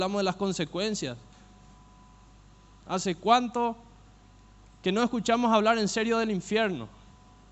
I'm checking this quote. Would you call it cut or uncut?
cut